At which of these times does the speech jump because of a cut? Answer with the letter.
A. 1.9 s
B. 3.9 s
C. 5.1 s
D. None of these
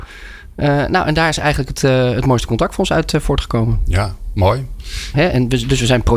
C